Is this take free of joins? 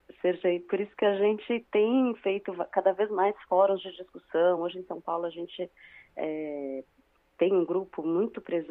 yes; 0 cuts

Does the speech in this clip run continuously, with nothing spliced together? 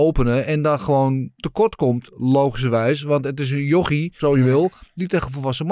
no; 1 cut; at 4.2 s

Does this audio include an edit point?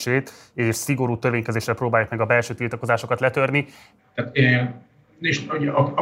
yes; 1 cut; at 4.0 s

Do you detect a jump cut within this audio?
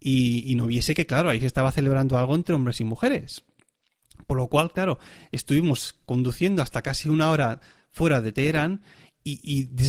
no; 0 cuts

